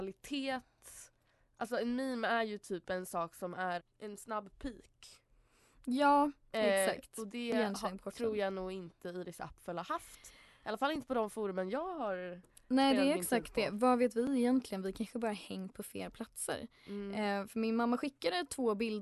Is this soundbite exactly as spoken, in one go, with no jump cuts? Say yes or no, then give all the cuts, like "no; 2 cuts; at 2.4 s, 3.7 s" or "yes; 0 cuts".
no; 1 cut; at 3.8 s